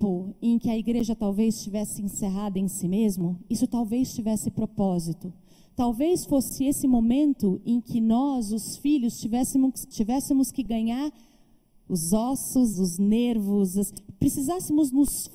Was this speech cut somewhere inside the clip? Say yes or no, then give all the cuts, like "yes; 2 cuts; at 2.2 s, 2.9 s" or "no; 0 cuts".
yes; 2 cuts; at 9.9 s, 12.7 s